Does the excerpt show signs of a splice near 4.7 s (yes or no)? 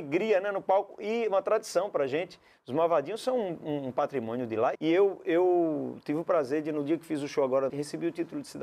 yes